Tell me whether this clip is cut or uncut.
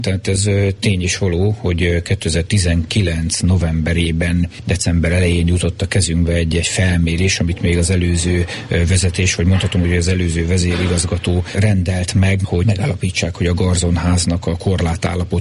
uncut